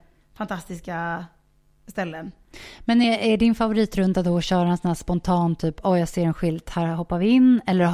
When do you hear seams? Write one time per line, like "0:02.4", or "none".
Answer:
none

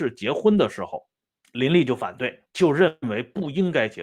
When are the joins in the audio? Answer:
0:01.4
0:02.5

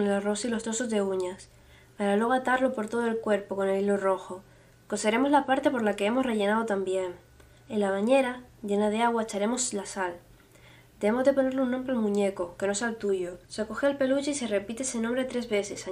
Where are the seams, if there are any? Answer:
0:13.4

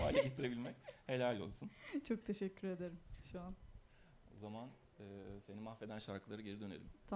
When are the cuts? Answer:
0:03.9

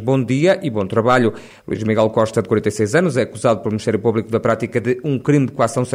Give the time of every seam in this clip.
0:01.5

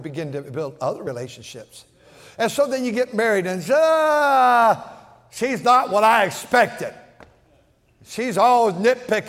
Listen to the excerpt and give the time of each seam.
none

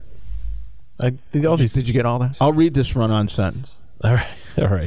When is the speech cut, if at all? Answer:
0:02.3

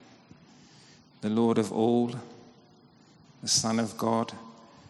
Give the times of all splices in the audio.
0:03.2

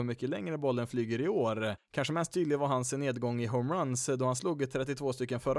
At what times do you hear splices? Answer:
0:01.8

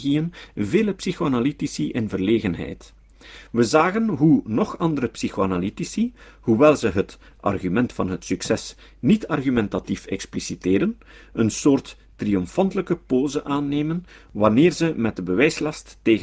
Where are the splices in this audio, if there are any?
0:03.5

